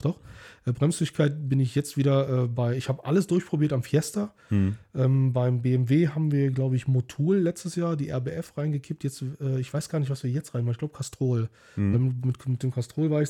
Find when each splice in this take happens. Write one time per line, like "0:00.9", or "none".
none

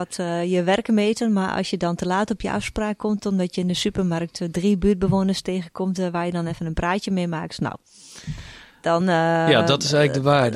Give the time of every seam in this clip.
none

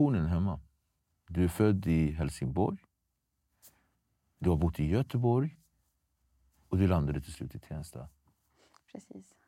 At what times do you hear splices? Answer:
none

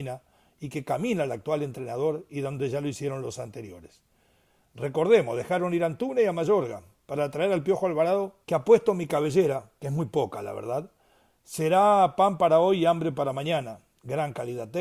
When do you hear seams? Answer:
0:08.4

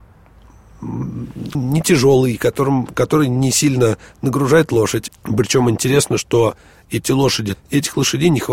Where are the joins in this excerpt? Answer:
0:01.5
0:05.1
0:07.5

